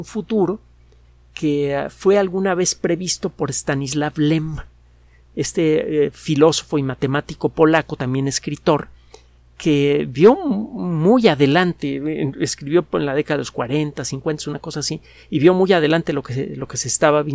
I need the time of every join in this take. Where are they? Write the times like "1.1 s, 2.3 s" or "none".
none